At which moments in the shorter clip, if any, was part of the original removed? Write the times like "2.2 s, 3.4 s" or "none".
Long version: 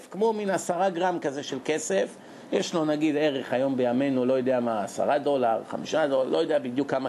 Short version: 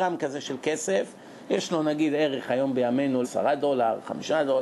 3.2 s